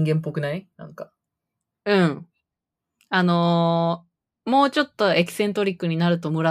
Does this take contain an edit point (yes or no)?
no